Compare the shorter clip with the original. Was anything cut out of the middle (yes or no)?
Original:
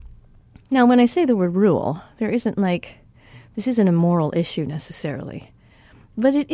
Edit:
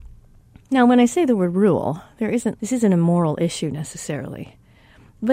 yes